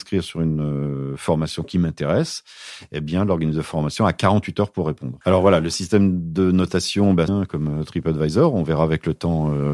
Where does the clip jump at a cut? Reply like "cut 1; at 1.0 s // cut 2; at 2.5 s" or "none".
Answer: cut 1; at 5.2 s // cut 2; at 7.3 s